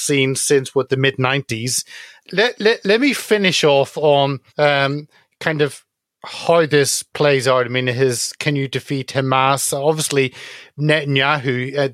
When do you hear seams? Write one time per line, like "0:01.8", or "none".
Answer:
0:02.2
0:04.5